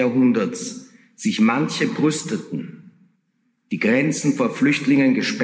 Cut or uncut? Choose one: uncut